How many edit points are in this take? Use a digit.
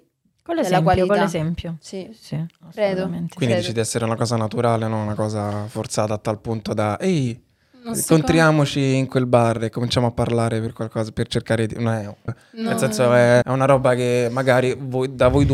2